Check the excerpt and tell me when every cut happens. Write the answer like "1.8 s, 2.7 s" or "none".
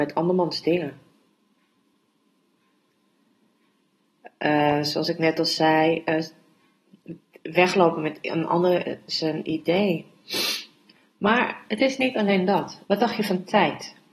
12.8 s